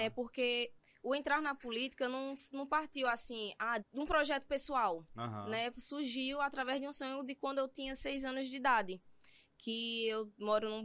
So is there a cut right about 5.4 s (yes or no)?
no